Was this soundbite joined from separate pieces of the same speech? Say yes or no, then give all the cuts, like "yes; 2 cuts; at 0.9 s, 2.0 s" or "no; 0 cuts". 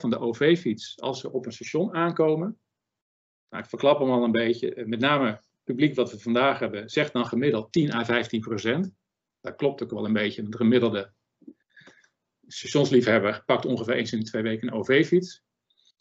no; 0 cuts